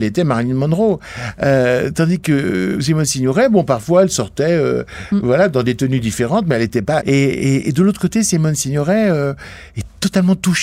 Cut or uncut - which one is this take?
cut